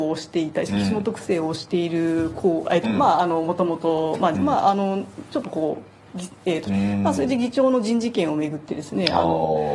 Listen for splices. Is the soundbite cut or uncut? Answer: cut